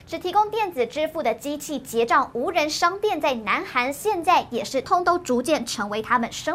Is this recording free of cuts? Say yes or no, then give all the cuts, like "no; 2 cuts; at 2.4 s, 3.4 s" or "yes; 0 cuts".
no; 1 cut; at 4.8 s